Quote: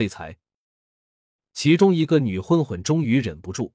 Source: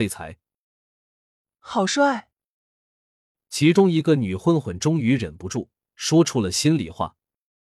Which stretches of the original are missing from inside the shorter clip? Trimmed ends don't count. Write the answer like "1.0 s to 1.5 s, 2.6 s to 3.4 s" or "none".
1.3 s to 3.3 s